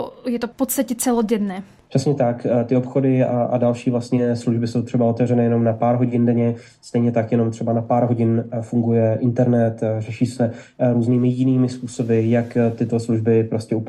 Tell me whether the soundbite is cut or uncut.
uncut